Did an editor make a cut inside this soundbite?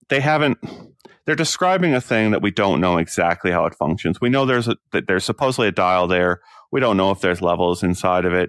no; 0 cuts

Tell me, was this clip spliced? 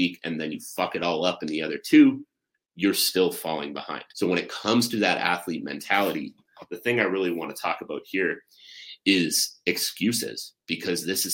yes; 1 cut; at 4.1 s

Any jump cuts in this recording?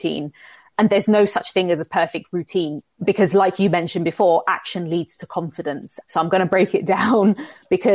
yes; 2 cuts; at 2.8 s, 6.0 s

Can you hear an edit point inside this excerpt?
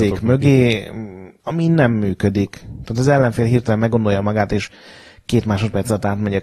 yes; 1 cut; at 1.4 s

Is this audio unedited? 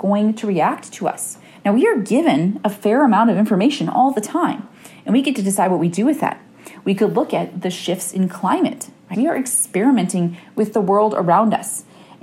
no; 1 cut; at 9.1 s

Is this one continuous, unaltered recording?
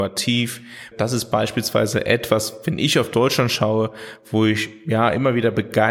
no; 1 cut; at 0.9 s

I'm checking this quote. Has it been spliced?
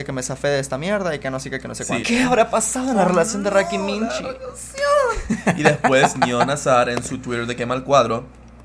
yes; 1 cut; at 2.0 s

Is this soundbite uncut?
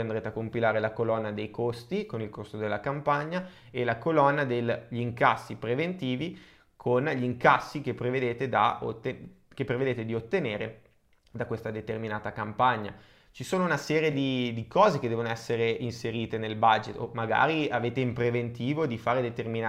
yes; 0 cuts

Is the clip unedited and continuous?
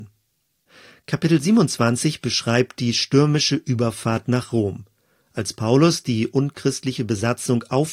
yes; 0 cuts

